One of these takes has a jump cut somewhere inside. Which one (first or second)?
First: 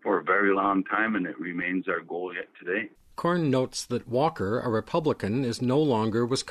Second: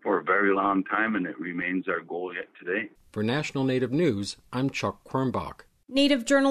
second